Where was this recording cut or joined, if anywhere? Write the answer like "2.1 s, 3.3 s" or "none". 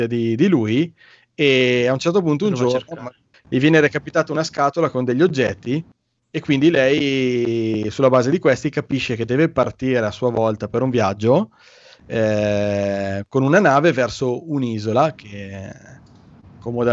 3.3 s